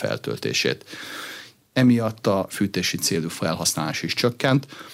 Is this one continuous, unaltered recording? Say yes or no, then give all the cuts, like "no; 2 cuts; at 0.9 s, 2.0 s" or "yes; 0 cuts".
no; 1 cut; at 1.7 s